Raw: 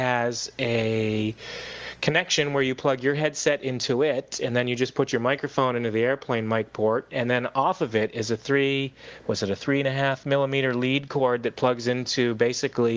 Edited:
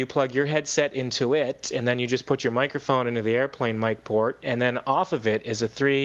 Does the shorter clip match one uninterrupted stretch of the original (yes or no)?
yes